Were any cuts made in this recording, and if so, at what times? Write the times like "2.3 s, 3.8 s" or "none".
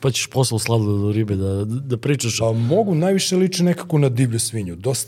2.4 s